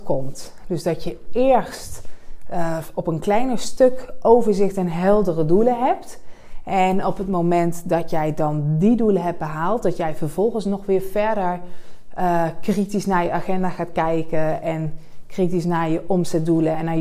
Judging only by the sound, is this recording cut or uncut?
uncut